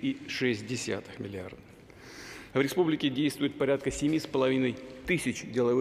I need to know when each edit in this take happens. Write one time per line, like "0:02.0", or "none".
0:02.5